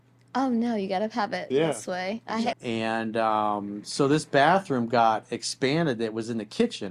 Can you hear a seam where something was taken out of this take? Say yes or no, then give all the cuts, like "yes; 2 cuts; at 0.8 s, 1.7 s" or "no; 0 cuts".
yes; 1 cut; at 2.5 s